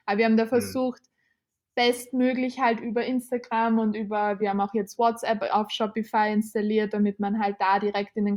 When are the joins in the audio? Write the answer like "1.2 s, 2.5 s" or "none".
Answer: none